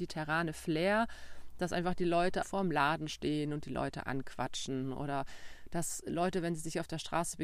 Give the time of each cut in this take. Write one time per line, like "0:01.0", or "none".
0:02.4